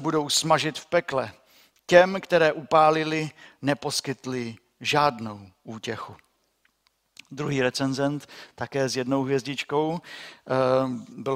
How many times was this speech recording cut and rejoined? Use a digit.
0